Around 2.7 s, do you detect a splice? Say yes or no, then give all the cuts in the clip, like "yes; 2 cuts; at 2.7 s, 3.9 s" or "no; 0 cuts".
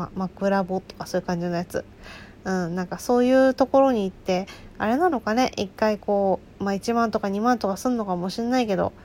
no; 0 cuts